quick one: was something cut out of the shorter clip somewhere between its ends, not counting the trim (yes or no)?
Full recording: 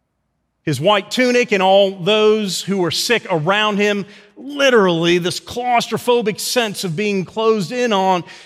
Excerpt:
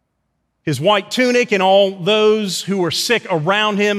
no